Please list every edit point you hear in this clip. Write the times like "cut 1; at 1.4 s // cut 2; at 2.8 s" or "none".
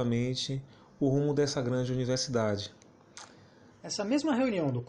cut 1; at 3.7 s